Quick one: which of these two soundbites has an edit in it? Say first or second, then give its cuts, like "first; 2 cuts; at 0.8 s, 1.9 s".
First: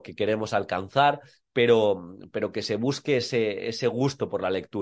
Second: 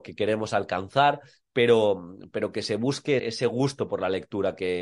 second; 1 cut; at 3.2 s